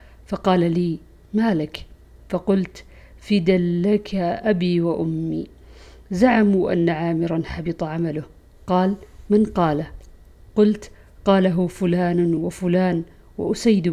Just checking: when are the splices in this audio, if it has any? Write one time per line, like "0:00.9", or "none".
0:12.4